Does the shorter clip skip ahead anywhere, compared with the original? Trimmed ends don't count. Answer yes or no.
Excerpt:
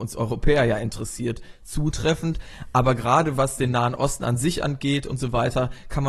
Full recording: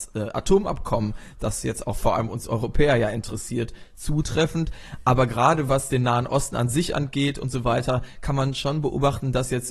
no